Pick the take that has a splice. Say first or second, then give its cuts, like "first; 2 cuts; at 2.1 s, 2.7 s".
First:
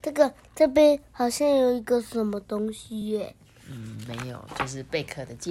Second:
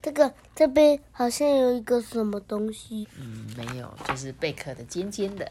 second; 1 cut; at 3.0 s